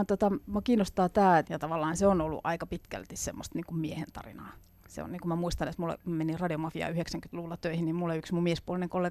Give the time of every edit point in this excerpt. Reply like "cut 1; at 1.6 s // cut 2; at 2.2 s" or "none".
cut 1; at 1.4 s